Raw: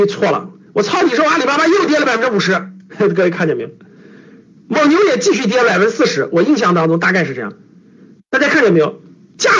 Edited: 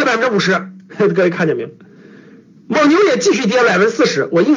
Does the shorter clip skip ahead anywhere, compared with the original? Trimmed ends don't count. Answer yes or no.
no